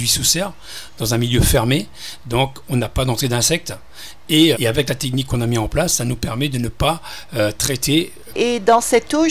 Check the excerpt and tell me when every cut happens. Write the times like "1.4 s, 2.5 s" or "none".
4.5 s, 8.3 s